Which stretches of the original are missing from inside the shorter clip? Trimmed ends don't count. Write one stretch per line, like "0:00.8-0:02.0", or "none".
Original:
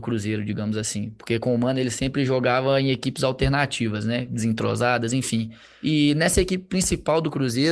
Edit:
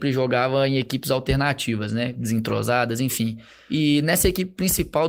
none